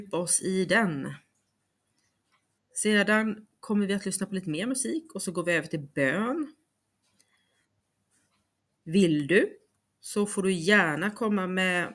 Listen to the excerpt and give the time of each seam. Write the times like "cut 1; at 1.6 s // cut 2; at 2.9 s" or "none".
cut 1; at 8.7 s